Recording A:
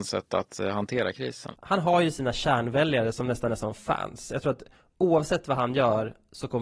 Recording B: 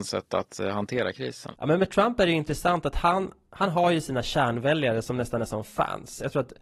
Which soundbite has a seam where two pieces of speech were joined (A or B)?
A